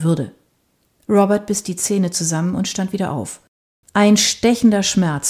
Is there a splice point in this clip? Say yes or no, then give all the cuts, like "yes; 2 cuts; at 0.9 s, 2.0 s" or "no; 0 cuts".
yes; 1 cut; at 3.8 s